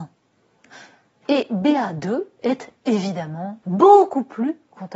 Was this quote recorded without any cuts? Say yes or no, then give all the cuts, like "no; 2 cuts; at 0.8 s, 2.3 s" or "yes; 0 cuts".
no; 2 cuts; at 1.2 s, 3.6 s